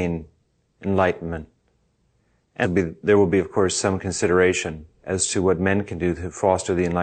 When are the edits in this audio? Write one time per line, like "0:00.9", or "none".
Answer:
0:02.6
0:04.9